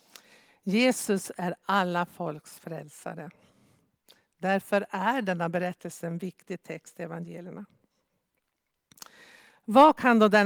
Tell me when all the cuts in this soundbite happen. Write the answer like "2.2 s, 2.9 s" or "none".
none